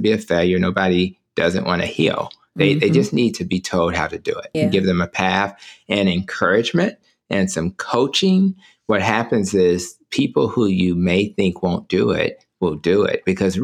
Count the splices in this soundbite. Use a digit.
1